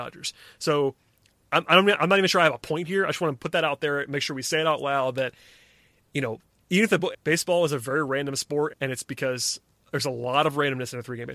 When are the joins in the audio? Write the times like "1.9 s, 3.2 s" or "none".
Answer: 7.1 s, 8.7 s